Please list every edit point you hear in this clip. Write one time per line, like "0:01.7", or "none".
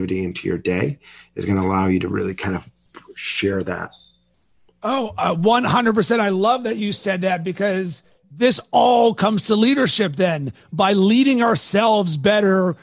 none

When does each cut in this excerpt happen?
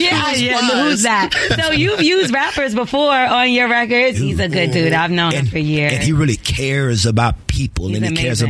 0:04.1

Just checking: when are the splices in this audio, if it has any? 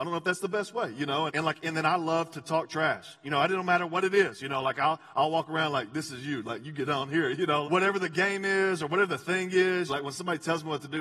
0:01.3
0:07.6
0:09.9

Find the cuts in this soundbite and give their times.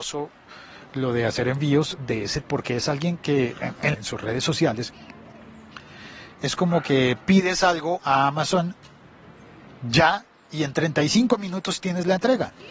0:02.4
0:03.9

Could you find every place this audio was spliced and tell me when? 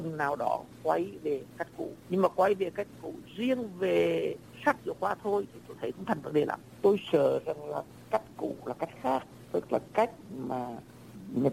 none

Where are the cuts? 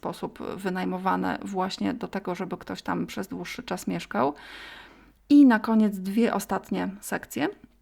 0:05.2

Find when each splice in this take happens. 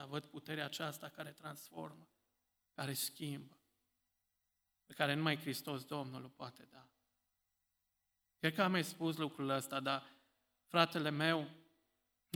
none

